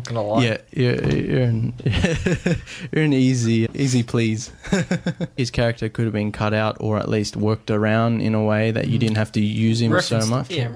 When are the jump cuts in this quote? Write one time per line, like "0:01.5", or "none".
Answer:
0:03.7
0:05.4